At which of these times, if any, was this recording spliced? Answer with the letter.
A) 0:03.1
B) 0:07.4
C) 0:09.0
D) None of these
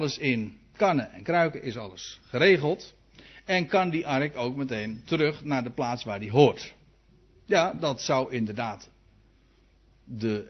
D